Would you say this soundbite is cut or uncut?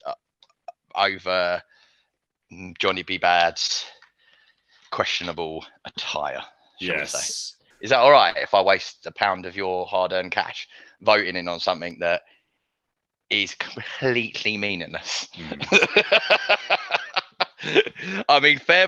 cut